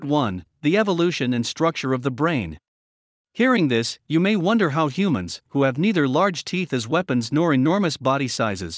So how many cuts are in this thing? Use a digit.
1